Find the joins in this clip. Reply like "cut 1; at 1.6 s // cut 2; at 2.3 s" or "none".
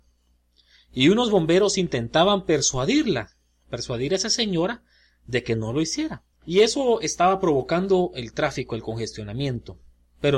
cut 1; at 6.3 s